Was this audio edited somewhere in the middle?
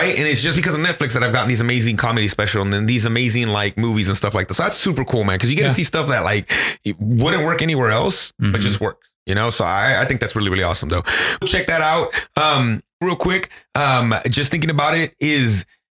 yes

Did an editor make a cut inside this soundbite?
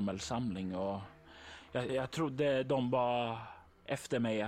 yes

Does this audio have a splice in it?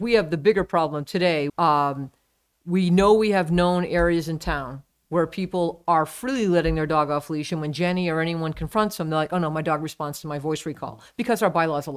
yes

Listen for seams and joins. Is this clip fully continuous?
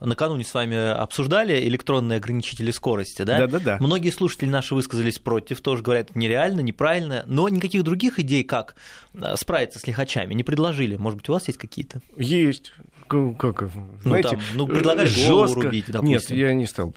yes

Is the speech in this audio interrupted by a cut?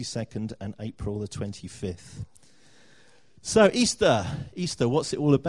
no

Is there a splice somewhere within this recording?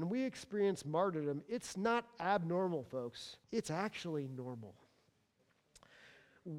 yes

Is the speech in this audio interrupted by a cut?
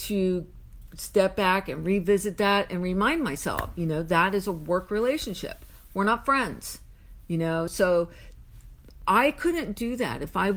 no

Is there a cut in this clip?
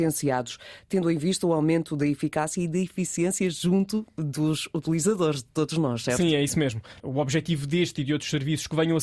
yes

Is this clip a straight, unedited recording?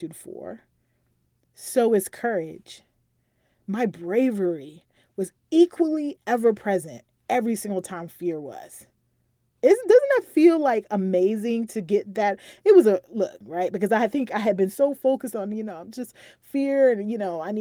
no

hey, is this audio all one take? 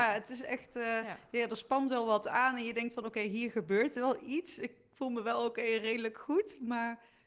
yes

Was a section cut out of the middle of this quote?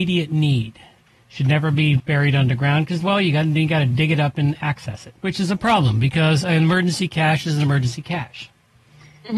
yes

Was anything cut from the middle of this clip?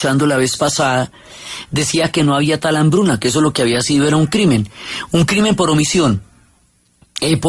no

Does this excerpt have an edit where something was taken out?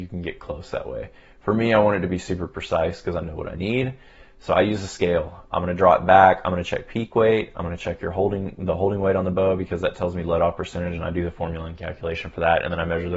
no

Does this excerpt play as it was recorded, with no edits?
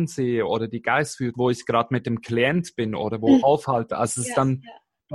no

